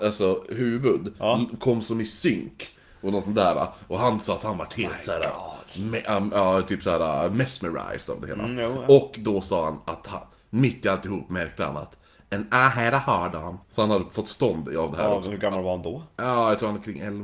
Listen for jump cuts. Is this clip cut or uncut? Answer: cut